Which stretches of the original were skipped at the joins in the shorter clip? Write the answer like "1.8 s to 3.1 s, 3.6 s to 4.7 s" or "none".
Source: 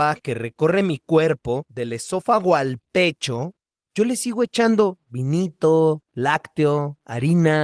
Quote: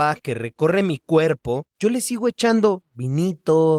1.7 s to 3.8 s